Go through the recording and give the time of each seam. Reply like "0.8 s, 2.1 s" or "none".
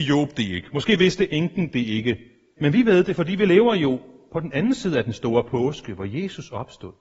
2.6 s